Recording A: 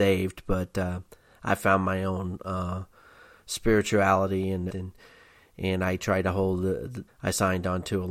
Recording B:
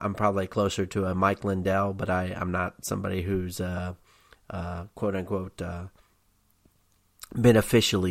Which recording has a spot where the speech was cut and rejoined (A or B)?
A